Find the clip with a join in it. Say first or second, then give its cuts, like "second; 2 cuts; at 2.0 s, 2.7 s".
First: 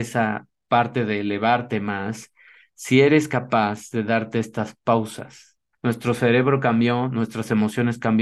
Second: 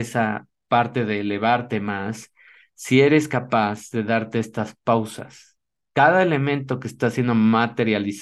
first; 1 cut; at 5.7 s